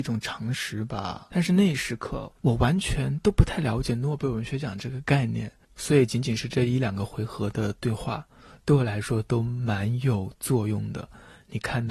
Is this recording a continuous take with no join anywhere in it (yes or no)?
yes